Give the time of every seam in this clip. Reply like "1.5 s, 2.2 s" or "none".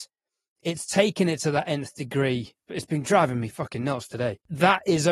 2.7 s